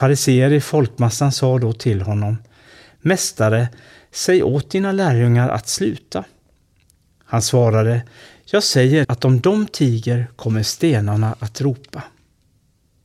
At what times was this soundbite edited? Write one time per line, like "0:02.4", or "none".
0:09.0